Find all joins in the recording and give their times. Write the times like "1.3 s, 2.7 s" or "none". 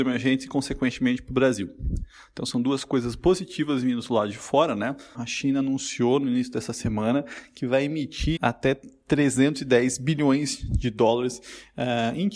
5.1 s, 8.4 s